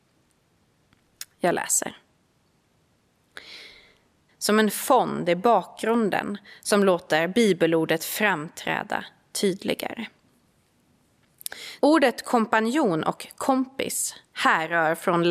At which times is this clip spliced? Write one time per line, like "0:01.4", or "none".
0:04.3
0:11.8